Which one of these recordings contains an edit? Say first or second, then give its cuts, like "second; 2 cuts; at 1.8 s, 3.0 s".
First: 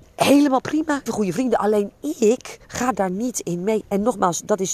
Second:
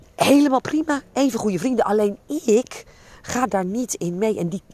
first; 3 cuts; at 1.1 s, 2.6 s, 3.8 s